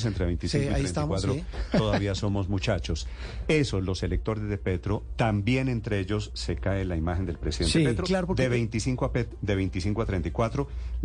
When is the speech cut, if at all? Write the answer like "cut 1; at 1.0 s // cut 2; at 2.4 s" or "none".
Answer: none